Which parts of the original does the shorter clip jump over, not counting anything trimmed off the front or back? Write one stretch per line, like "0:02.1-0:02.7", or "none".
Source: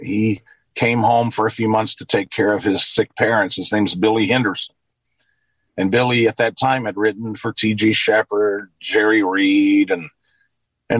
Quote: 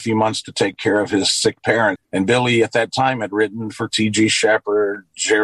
0:03.5-0:05.6